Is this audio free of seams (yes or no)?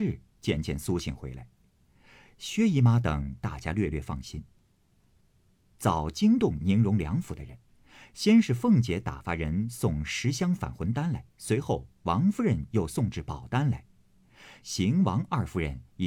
no